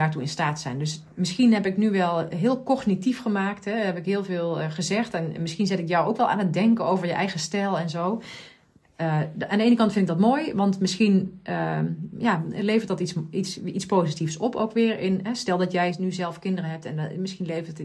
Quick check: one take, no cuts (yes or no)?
yes